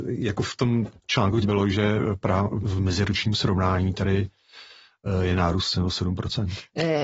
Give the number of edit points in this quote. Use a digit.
2